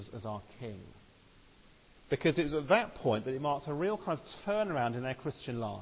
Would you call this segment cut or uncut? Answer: cut